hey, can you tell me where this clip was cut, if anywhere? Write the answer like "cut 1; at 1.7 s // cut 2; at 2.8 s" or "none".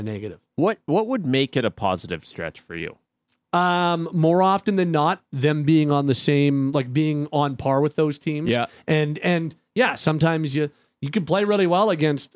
none